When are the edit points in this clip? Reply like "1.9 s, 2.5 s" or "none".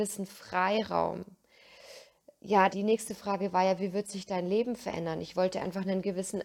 2.7 s